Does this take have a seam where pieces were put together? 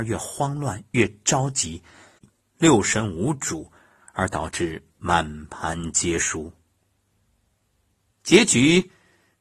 yes; 2 cuts; at 2.4 s, 8.1 s

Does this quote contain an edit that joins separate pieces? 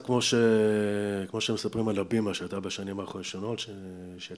no; 0 cuts

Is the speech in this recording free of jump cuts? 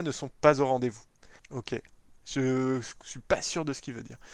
no; 1 cut; at 1.4 s

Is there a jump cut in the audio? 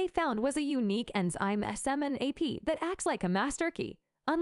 no; 0 cuts

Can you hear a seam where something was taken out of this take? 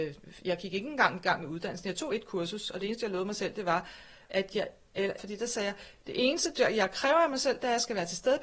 yes; 1 cut; at 5.2 s

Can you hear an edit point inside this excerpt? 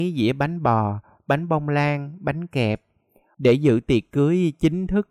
yes; 1 cut; at 3.3 s

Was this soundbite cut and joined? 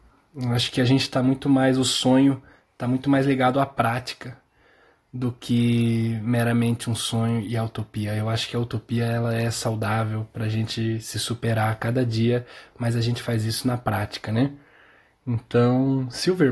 no; 0 cuts

